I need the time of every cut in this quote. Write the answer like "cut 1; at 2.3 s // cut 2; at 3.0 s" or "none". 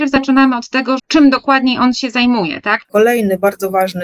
cut 1; at 1.0 s // cut 2; at 2.8 s

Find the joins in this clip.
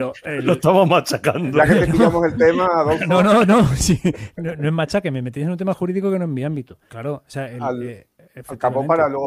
cut 1; at 6.9 s

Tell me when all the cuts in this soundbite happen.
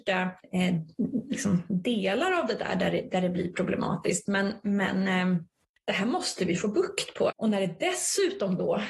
cut 1; at 7.3 s

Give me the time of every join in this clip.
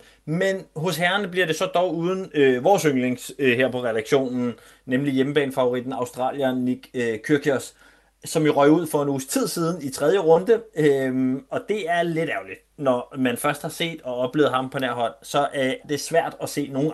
cut 1; at 15.8 s

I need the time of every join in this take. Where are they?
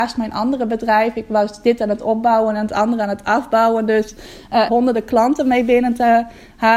cut 1; at 4.7 s

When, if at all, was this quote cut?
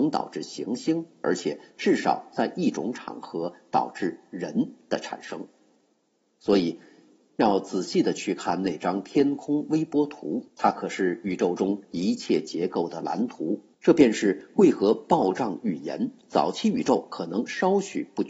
cut 1; at 10.5 s // cut 2; at 13.7 s

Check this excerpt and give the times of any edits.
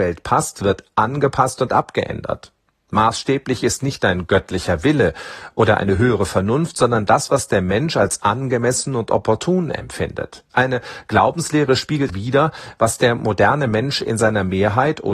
cut 1; at 10.5 s // cut 2; at 12.1 s

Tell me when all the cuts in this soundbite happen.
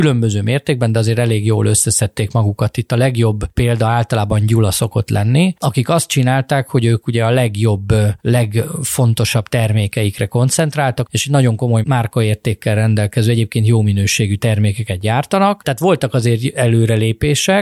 cut 1; at 11.1 s // cut 2; at 15.6 s

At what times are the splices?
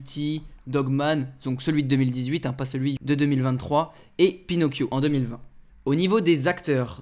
none

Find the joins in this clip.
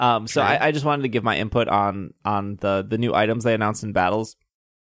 none

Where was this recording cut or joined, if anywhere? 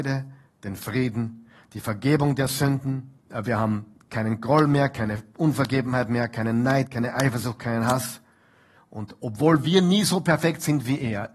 cut 1; at 3.2 s // cut 2; at 8.8 s

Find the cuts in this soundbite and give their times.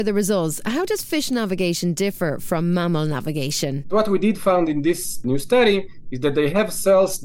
cut 1; at 3.8 s

